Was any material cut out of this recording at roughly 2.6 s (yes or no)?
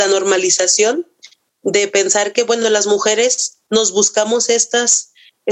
no